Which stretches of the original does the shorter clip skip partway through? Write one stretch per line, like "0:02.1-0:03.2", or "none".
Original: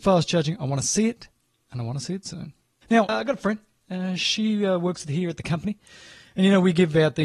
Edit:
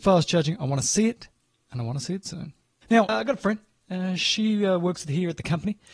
none